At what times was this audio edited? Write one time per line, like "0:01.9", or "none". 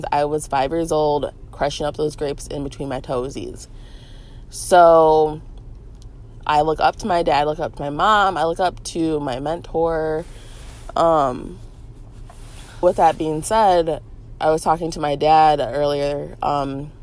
0:12.8